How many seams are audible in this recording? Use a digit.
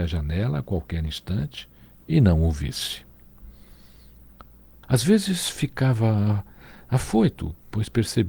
1